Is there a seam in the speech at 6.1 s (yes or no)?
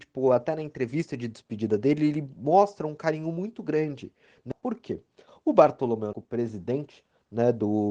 yes